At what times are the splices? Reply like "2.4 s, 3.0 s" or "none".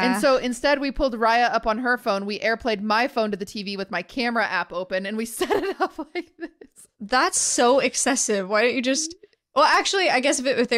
none